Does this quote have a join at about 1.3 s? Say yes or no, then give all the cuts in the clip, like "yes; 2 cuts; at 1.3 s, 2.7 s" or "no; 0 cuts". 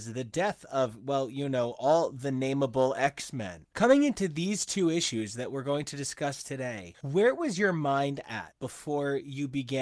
no; 1 cut; at 3.7 s